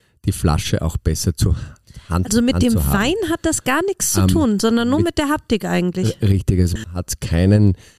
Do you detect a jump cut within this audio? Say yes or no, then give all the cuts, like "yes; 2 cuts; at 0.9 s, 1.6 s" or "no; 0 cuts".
no; 0 cuts